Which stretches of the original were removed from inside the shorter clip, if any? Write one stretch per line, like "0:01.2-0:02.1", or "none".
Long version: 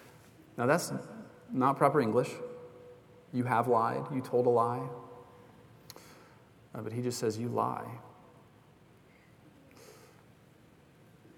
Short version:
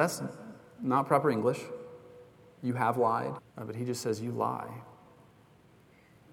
0:04.1-0:06.6